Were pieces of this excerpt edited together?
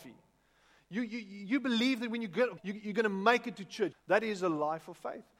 yes; 2 cuts; at 2.6 s, 3.9 s

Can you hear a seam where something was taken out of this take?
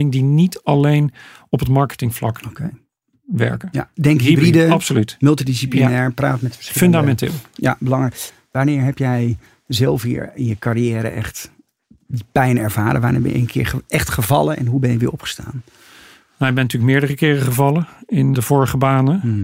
yes; 2 cuts; at 4.0 s, 18.3 s

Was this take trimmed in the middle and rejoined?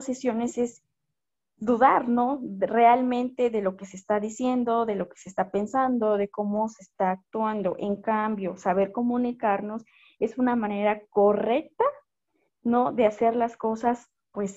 no; 0 cuts

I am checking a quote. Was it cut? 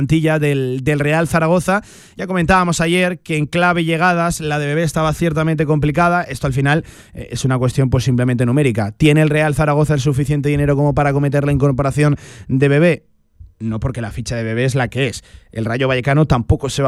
no; 0 cuts

